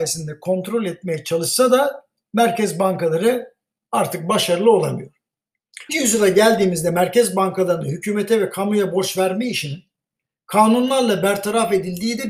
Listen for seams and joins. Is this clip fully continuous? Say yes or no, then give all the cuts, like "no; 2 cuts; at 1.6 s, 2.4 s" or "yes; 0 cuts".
no; 1 cut; at 5.9 s